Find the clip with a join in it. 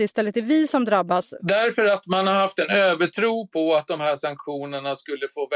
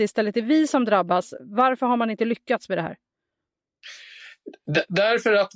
first; 1 cut; at 1.4 s

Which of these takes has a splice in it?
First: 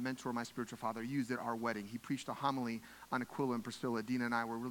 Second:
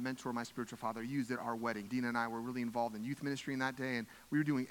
second; 1 cut; at 1.9 s

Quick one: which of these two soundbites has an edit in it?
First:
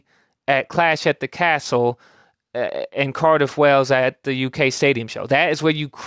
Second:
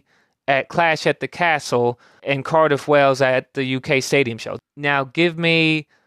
second; 2 cuts; at 2.2 s, 4.6 s

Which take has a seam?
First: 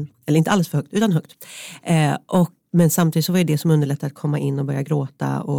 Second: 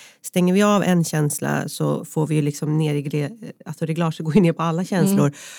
first; 1 cut; at 2.6 s

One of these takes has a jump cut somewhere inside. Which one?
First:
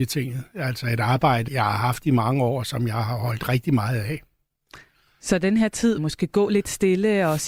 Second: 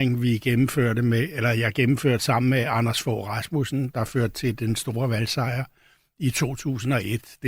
first; 2 cuts; at 1.5 s, 6.0 s

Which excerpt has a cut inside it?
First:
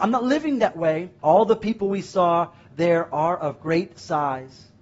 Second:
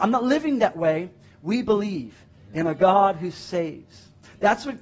first; 1 cut; at 1.2 s

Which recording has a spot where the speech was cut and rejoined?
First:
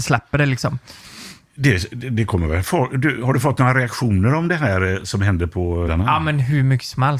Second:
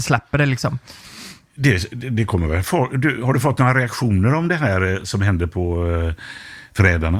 first; 1 cut; at 5.8 s

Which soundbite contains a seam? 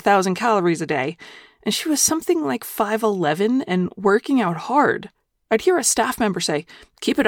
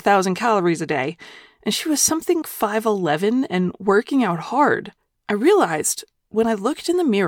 second; 2 cuts; at 2.4 s, 5.1 s

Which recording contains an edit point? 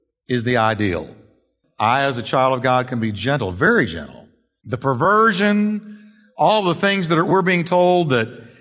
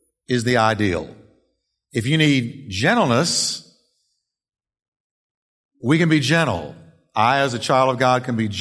first; 2 cuts; at 1.6 s, 4.6 s

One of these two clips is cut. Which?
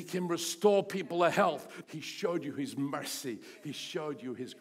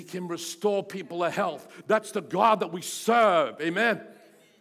first; 1 cut; at 1.8 s

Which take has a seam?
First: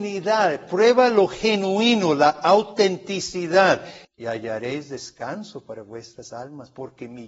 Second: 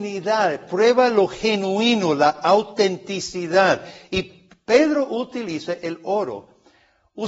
first; 1 cut; at 4.0 s

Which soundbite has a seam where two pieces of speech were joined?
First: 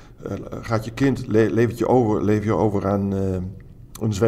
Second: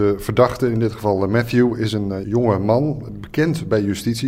second; 1 cut; at 2.2 s

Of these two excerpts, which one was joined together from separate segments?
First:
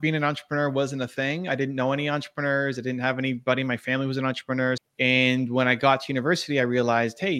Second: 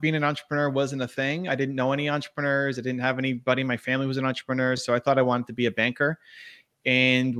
first; 1 cut; at 4.8 s

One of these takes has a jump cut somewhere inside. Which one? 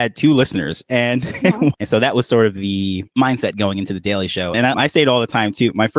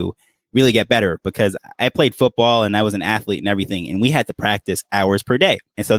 first; 2 cuts; at 1.7 s, 4.7 s

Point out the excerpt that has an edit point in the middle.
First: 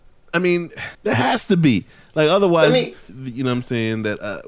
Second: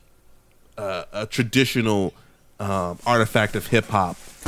first; 2 cuts; at 0.9 s, 3.1 s

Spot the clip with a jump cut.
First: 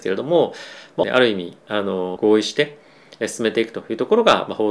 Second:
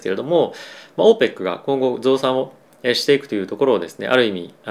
first; 2 cuts; at 1.0 s, 2.2 s

